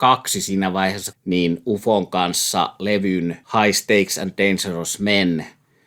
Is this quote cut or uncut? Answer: cut